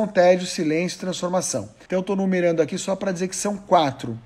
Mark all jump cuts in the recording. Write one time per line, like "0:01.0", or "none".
0:01.9

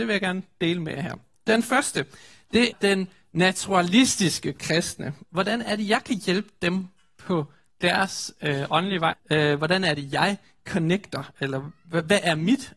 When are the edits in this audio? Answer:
0:02.7
0:05.2
0:09.1

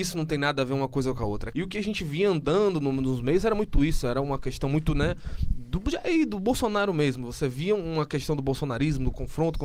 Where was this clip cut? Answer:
0:01.5

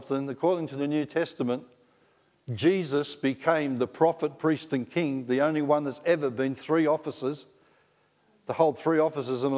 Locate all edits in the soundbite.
none

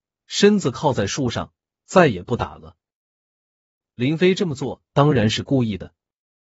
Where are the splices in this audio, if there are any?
none

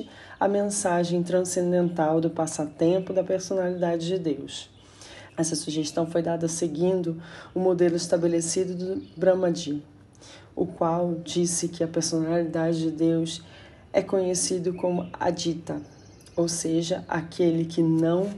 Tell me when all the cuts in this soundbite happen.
0:05.3

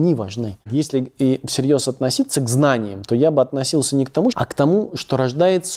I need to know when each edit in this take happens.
0:04.3

